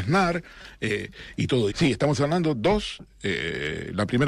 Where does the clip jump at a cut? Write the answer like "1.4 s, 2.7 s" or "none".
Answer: 1.7 s